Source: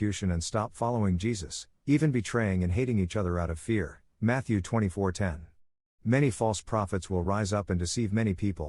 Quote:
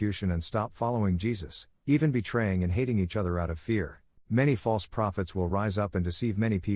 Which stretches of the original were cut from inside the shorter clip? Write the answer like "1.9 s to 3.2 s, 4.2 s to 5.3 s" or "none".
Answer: 4.2 s to 5.9 s

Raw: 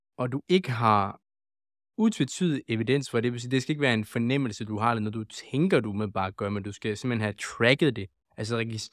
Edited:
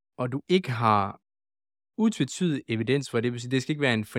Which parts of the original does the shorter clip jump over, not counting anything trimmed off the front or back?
none

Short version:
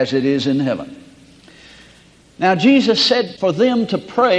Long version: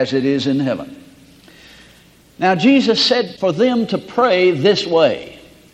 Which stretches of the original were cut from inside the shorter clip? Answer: none

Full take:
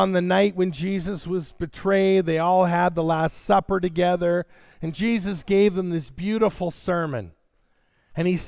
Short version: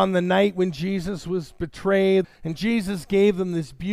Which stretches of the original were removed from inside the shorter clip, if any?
2.2 s to 4.6 s

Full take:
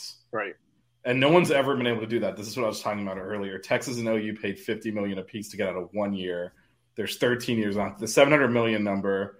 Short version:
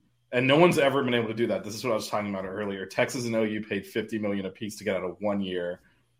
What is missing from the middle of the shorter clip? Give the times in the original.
none

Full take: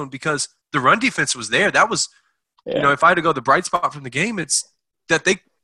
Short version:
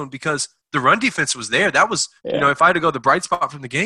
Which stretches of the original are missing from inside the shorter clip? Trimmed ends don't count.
2.2 s to 2.6 s

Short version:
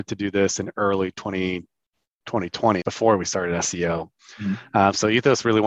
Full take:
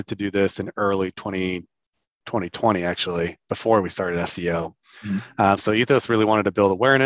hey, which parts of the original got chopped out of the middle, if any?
2.8 s to 3.5 s

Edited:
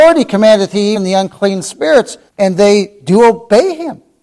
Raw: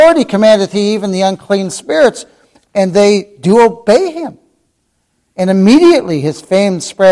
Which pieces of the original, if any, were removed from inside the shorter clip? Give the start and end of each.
0.9 s to 1.0 s, 2.4 s to 2.6 s

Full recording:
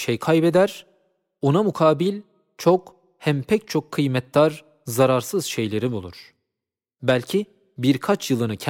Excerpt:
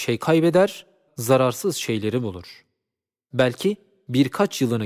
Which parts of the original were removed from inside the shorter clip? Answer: 1.1 s to 4.8 s

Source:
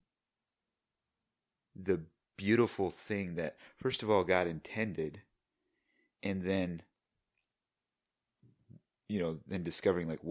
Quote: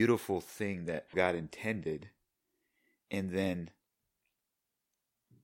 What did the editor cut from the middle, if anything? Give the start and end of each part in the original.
3.6 s to 4.3 s

